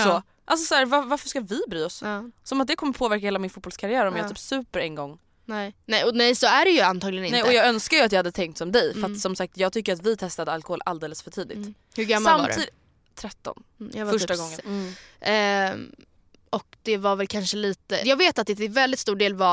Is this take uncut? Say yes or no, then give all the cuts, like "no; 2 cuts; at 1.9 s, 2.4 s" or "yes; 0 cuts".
no; 2 cuts; at 14.6 s, 18.0 s